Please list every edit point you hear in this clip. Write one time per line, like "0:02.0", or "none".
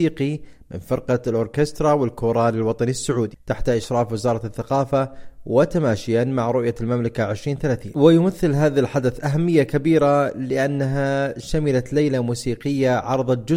0:03.4